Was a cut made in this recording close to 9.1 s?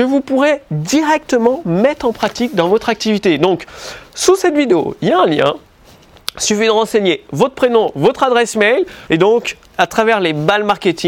yes; 1 cut; at 9.1 s

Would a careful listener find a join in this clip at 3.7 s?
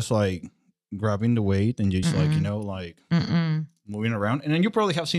no; 1 cut; at 2.0 s

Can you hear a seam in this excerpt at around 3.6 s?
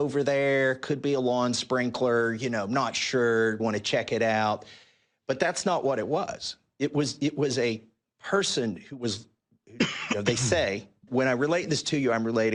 yes; 2 cuts; at 3.6 s, 11.1 s

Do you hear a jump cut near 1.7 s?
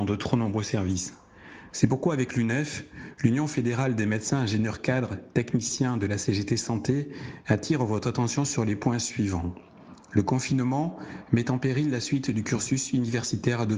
yes; 1 cut; at 1.7 s

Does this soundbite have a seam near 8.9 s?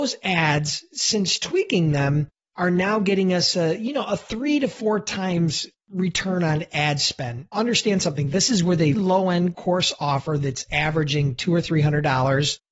yes; 2 cuts; at 7.5 s, 8.9 s

